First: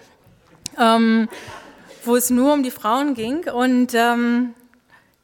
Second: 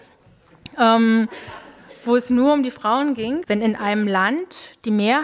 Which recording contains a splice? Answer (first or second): second